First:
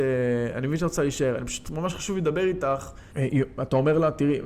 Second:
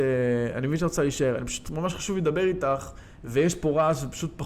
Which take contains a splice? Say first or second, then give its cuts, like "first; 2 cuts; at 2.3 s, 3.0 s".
first; 1 cut; at 3.1 s